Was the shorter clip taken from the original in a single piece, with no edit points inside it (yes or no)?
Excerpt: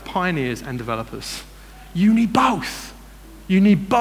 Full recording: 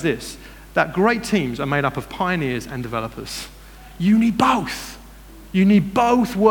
yes